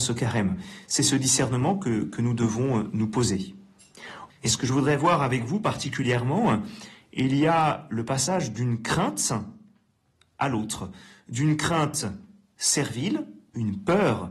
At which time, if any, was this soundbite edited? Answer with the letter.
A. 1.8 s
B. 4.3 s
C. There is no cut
B